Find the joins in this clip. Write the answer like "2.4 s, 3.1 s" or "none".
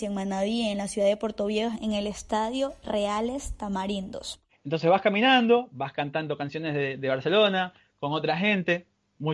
4.5 s